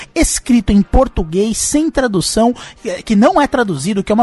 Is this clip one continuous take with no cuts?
yes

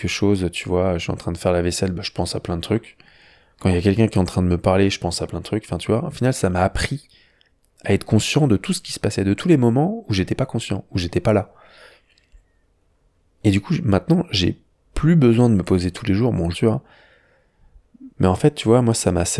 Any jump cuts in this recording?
yes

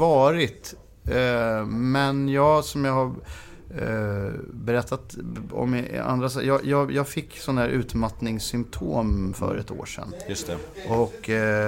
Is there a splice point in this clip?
no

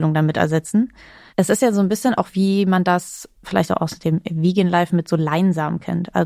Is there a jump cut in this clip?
yes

